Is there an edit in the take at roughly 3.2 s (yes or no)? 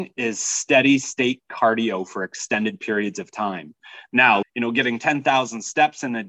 no